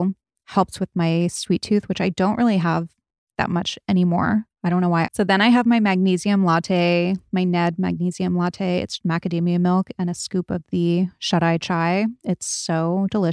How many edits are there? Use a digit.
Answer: 2